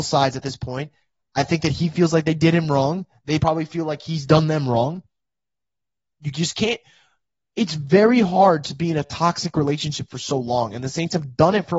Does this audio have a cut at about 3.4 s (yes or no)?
no